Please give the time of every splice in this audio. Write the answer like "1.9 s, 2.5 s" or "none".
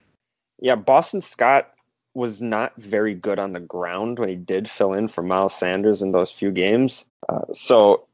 7.1 s